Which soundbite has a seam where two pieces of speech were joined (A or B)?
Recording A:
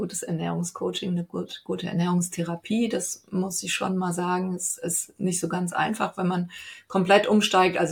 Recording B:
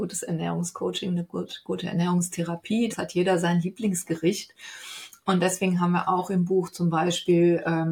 B